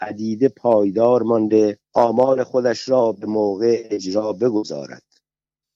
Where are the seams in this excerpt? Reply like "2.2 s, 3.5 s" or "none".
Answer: 1.8 s